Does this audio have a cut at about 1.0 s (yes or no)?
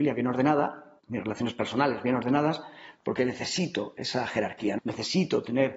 yes